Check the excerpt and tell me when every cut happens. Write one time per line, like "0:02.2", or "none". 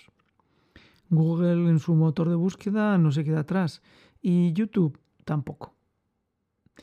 none